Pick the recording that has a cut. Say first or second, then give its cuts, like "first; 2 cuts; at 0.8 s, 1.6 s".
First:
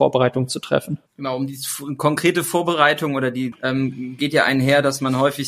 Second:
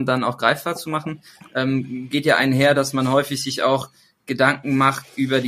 first; 2 cuts; at 1.1 s, 3.5 s